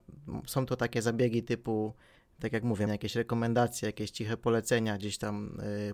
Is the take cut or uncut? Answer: cut